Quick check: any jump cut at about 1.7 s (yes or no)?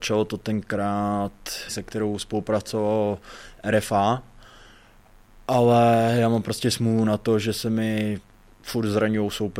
yes